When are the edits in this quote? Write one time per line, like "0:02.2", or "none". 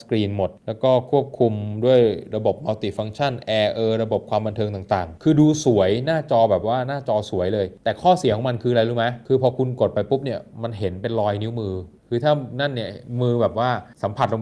none